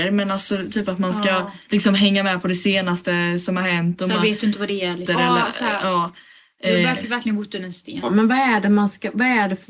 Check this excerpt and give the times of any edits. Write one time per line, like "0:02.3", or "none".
0:05.1
0:08.0

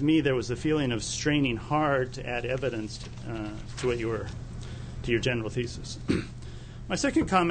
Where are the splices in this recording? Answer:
none

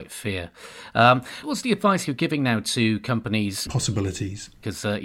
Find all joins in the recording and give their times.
0:01.4
0:03.7

